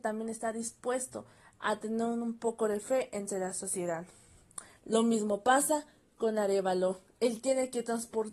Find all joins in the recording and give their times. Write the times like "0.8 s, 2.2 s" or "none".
4.8 s

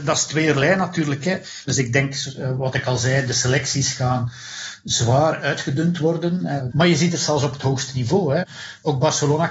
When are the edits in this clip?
1.7 s, 6.7 s

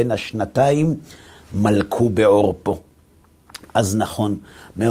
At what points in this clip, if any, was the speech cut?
none

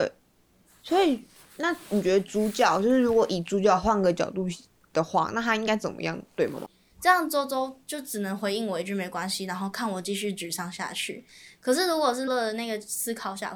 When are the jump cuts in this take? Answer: 6.7 s, 12.3 s

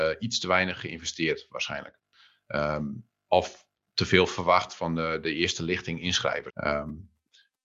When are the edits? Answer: 6.5 s

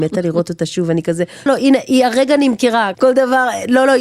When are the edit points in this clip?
1.5 s, 2.9 s

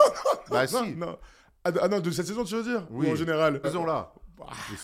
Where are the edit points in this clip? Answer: 3.6 s

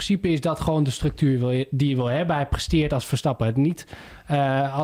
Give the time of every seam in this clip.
none

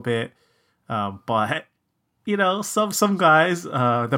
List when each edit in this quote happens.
none

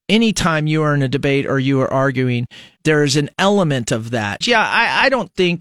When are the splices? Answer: 2.8 s, 4.4 s

